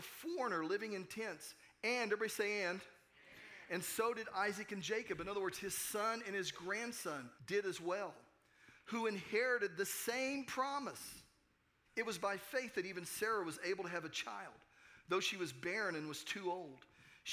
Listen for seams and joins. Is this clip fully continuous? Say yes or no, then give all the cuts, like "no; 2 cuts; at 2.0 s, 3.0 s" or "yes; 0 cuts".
no; 2 cuts; at 7.4 s, 11.9 s